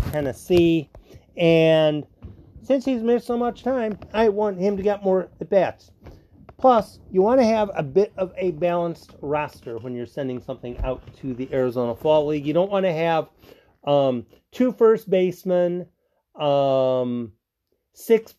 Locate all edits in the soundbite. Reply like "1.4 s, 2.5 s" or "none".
none